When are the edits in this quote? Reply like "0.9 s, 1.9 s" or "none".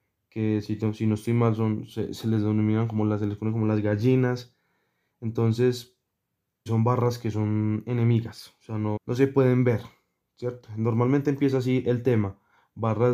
6.7 s, 9.0 s